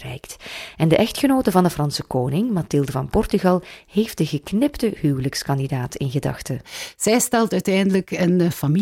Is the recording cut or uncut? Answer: uncut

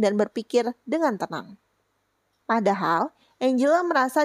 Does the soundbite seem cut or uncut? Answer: cut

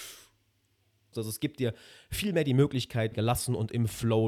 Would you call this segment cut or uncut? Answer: cut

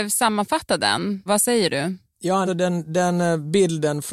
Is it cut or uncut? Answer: cut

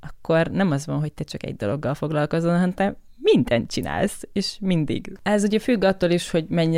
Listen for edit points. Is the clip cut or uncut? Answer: cut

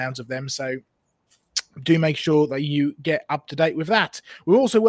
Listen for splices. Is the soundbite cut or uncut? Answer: uncut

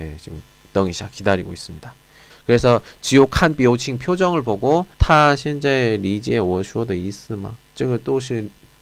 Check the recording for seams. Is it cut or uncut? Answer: cut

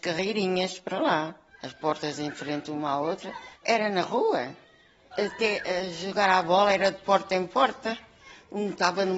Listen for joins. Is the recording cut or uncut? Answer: cut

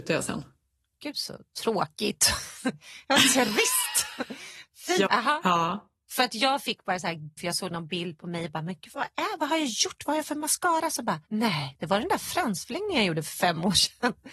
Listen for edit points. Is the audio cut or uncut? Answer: cut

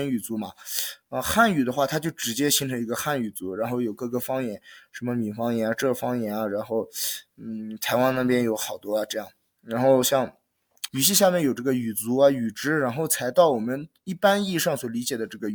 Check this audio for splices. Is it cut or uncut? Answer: cut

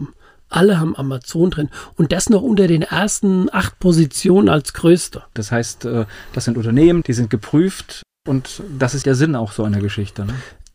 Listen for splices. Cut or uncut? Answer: cut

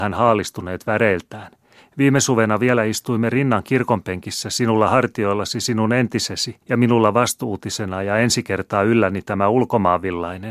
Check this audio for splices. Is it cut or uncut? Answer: cut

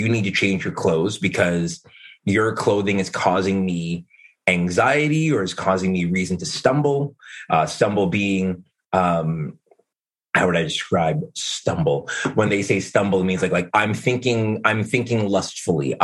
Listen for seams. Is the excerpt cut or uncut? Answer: uncut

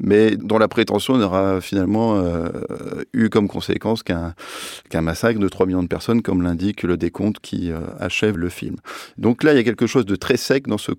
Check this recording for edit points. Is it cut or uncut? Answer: cut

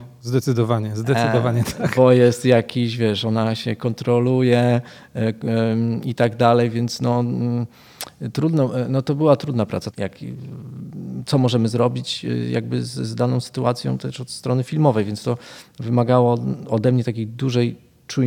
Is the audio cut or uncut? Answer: cut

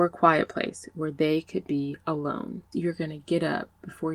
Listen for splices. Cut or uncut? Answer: cut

